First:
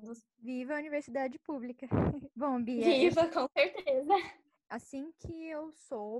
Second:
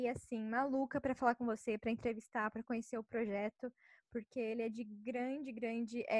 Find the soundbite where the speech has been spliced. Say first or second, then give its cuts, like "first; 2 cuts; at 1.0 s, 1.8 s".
first; 1 cut; at 4.6 s